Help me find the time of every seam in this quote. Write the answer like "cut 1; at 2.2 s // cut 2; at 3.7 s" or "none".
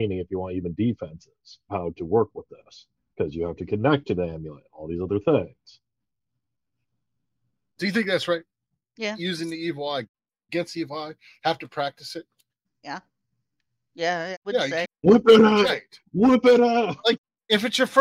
cut 1; at 12.6 s // cut 2; at 14.8 s